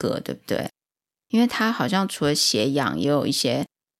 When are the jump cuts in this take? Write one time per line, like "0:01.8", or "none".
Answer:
none